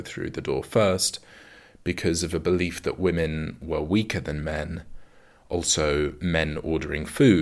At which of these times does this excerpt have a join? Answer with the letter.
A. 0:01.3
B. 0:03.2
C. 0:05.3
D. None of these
D